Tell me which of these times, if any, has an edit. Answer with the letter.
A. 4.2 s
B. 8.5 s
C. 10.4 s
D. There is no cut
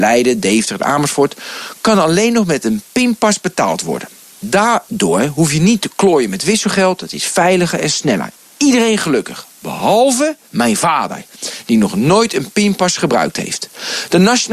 C